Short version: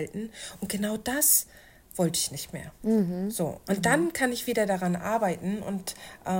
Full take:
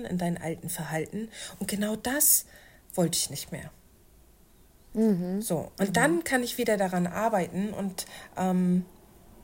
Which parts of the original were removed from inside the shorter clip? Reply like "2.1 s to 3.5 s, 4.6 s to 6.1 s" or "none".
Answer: 3.7 s to 4.9 s